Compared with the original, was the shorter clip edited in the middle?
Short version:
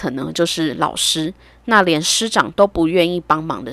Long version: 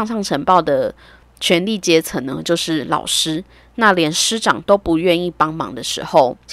no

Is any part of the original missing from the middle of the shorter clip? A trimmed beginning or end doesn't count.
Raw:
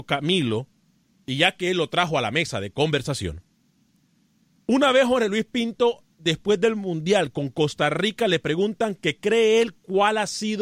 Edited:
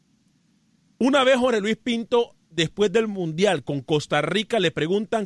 no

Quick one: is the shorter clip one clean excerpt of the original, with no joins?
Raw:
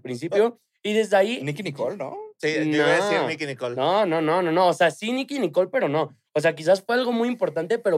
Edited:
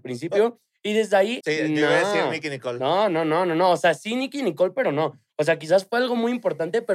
no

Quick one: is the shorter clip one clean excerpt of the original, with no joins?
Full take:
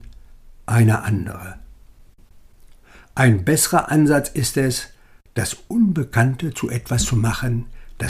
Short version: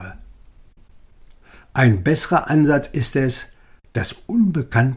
yes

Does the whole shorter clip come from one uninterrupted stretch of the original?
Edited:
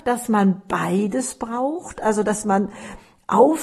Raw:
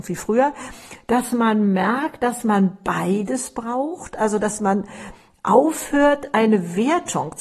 yes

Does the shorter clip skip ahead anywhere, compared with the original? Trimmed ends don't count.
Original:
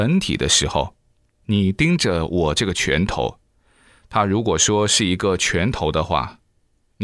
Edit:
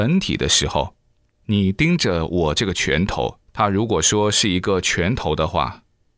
yes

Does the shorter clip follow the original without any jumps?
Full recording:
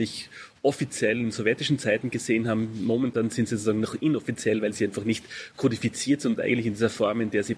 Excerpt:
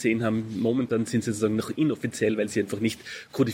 yes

